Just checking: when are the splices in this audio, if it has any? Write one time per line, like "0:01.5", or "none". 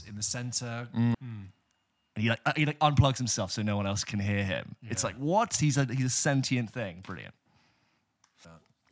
0:01.1

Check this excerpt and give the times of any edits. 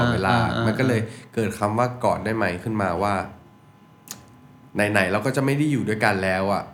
none

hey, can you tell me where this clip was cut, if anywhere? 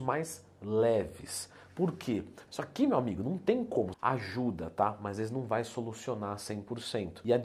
0:02.5
0:03.9

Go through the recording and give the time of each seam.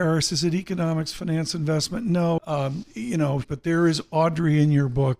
0:02.4
0:03.4

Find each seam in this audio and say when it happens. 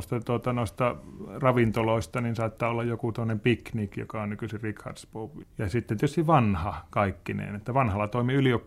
0:05.4

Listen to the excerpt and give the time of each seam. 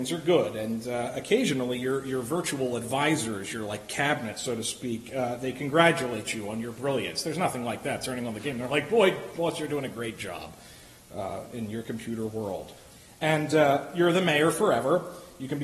none

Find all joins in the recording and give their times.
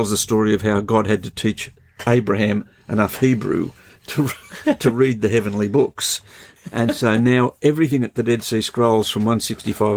none

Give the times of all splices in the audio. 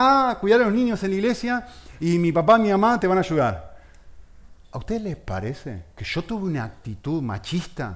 0:04.6
0:05.9

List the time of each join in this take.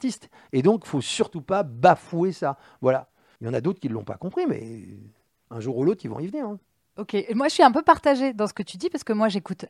0:03.4

